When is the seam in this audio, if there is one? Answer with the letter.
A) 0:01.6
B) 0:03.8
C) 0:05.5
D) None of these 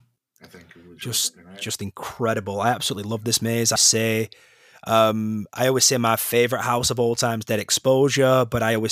B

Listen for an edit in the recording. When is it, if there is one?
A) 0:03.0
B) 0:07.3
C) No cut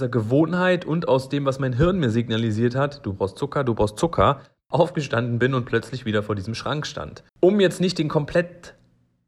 B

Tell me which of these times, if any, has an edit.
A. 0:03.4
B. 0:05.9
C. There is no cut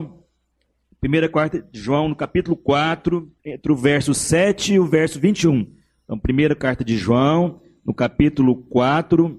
A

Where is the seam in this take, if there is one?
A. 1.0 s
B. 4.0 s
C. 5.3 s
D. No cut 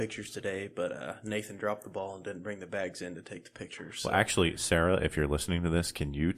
D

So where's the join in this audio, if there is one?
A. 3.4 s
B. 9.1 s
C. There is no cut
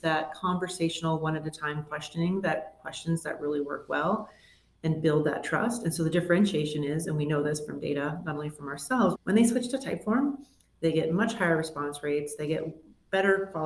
B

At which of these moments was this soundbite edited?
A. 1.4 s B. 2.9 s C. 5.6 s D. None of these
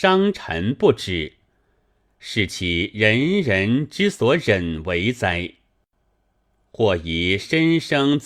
D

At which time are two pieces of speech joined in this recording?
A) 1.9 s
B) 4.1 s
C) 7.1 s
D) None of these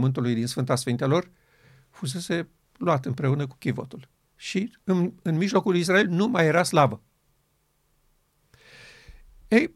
D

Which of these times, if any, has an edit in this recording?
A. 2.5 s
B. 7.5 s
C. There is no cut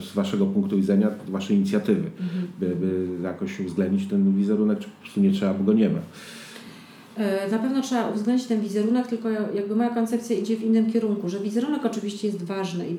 C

